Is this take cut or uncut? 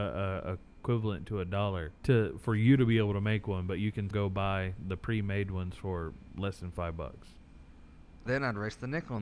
cut